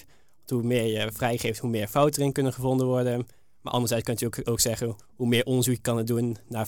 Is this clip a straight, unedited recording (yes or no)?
no